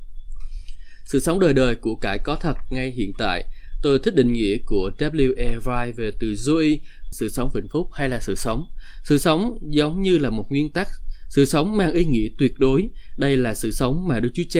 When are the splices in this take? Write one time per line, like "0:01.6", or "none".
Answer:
0:07.1